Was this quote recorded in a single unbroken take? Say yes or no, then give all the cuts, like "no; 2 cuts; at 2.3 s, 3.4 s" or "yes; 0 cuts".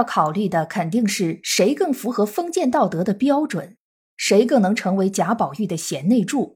yes; 0 cuts